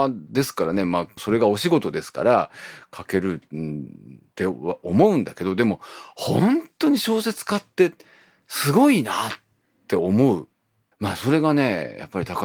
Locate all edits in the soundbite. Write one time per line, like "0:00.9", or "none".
0:01.2
0:10.9